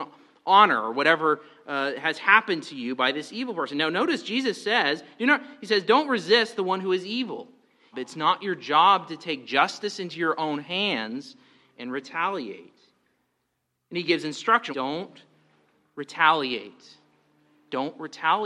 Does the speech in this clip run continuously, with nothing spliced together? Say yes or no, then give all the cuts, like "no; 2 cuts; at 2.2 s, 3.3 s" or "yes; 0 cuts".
no; 2 cuts; at 7.9 s, 14.7 s